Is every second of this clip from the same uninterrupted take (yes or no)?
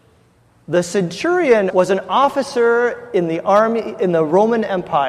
no